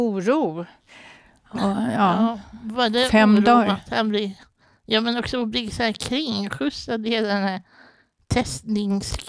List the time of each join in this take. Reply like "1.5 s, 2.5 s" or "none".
none